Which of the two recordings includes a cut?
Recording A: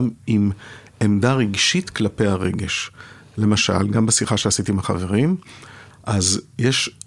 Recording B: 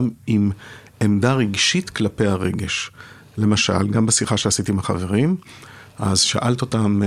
A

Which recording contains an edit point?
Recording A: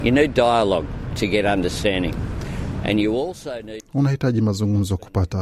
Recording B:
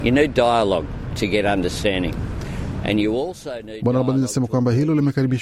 A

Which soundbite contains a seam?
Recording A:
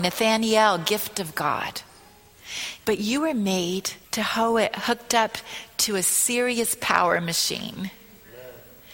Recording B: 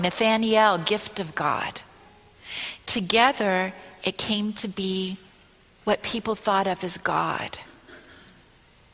A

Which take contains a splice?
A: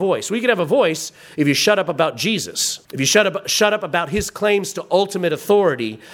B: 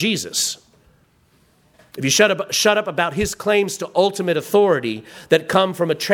A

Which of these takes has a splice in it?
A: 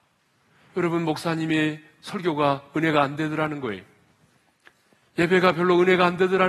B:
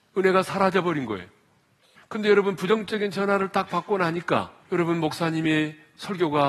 B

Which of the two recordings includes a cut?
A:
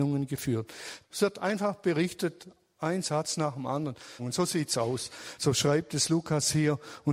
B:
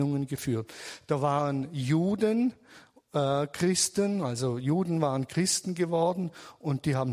A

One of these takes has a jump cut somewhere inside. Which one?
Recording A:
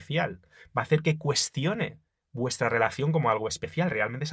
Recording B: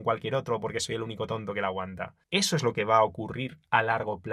B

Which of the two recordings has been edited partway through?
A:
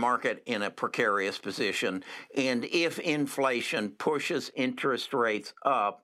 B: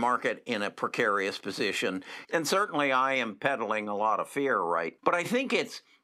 B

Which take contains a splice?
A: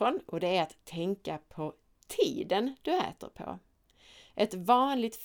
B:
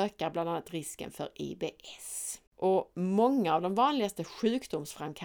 B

